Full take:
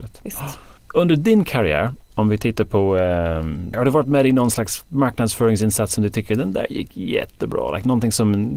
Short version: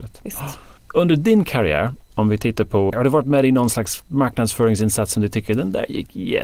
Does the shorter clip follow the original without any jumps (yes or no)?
no